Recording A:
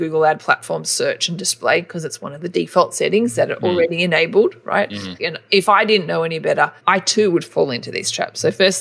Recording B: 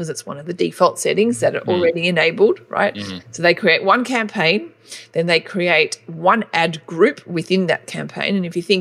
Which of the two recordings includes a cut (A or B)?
A